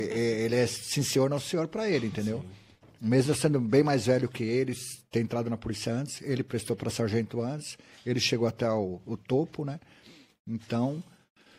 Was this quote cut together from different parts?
no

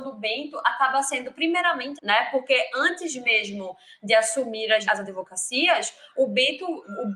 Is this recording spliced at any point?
yes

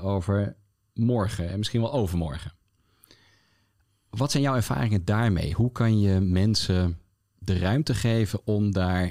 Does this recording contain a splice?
no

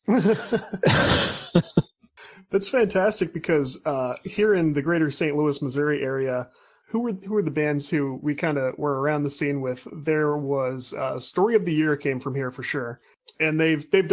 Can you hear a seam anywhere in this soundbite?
no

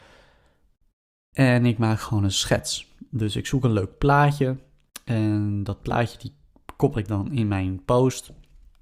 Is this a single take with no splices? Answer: yes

